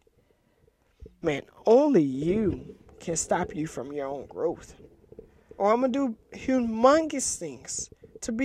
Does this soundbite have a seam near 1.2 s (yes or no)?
yes